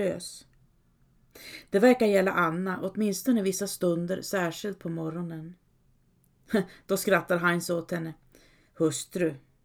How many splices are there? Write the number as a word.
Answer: zero